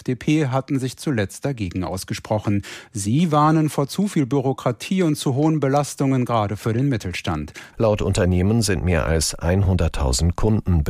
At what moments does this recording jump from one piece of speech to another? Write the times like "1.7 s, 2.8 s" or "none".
7.7 s